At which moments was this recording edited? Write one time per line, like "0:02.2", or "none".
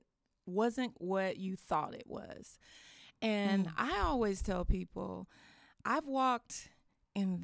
0:00.9

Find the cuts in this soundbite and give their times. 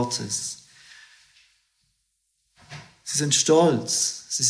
none

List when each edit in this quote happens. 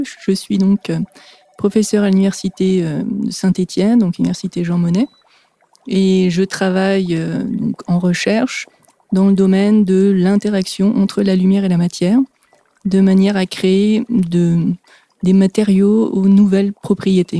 none

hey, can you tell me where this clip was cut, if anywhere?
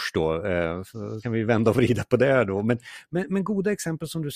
0:01.2

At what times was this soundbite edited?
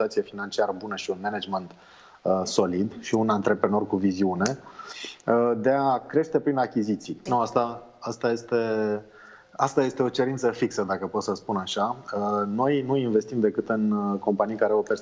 0:07.3

